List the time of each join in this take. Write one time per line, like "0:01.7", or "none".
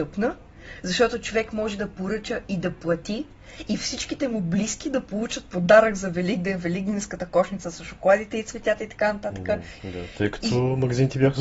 0:09.8

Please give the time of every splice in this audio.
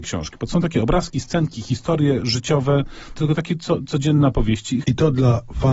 0:03.2
0:04.8

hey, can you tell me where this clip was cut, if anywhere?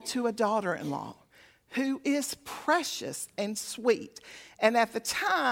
none

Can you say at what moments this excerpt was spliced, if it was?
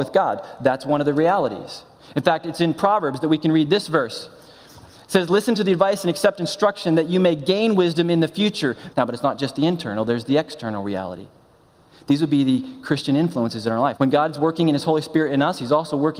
0:08.9
0:14.0

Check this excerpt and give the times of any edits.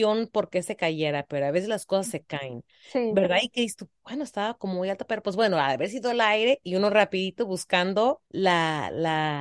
0:08.3

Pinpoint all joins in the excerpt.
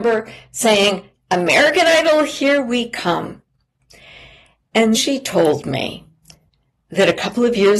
0:04.9

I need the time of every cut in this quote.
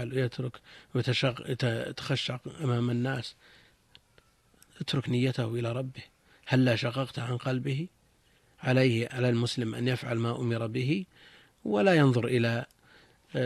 none

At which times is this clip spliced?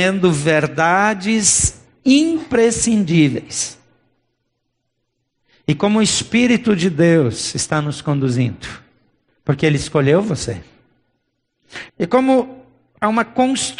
0:09.3
0:11.9

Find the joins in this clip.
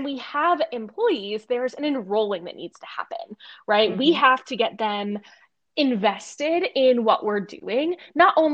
none

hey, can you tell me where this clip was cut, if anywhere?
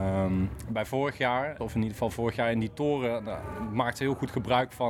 0:01.6

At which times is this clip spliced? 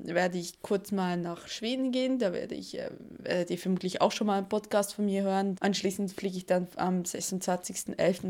0:05.6

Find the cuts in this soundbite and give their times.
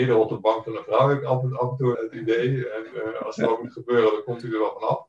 0:01.9

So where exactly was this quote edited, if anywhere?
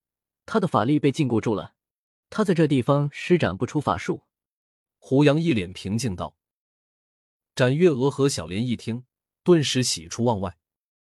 0:02.2

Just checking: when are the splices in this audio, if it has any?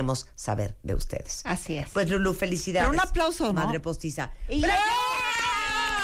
none

